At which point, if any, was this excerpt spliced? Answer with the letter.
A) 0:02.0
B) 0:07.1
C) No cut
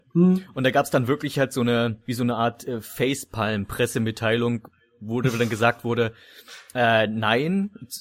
A